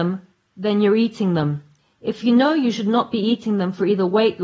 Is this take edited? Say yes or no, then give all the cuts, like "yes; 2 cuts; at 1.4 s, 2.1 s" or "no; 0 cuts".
no; 0 cuts